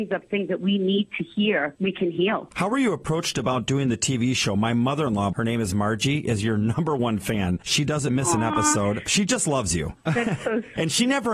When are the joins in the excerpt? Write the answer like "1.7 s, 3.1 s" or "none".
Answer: 5.3 s